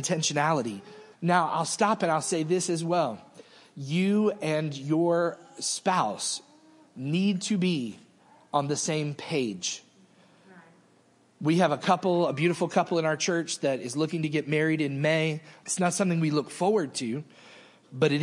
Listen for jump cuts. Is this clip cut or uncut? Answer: cut